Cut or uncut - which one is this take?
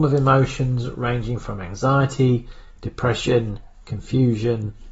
uncut